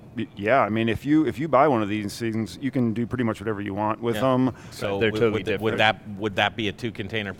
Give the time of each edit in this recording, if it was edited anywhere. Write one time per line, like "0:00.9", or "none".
0:04.7